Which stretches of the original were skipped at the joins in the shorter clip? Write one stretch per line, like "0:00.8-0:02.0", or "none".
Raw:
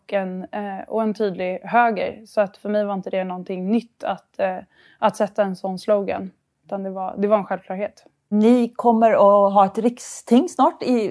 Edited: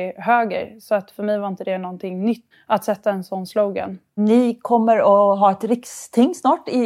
0:04.0-0:04.8
0:06.5-0:08.3